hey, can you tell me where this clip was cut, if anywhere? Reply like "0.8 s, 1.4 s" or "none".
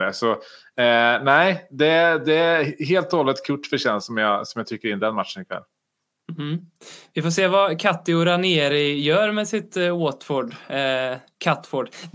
none